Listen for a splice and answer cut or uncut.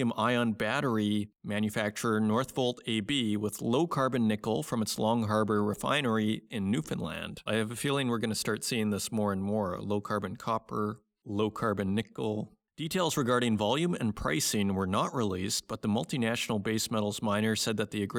cut